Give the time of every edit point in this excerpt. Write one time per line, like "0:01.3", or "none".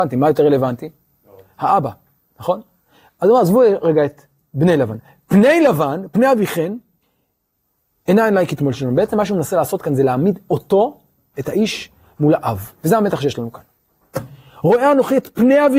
0:11.3
0:12.8